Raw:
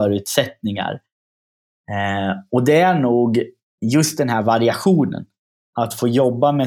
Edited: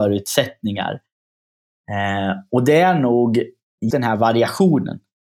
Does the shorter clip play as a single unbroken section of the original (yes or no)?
no